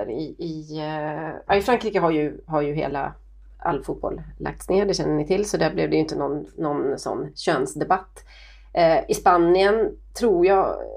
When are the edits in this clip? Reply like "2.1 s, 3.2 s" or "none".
none